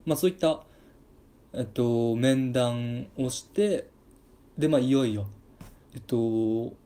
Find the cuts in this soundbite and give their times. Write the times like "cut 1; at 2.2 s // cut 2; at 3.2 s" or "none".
cut 1; at 5.8 s